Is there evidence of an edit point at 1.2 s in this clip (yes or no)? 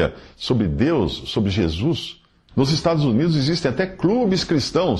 no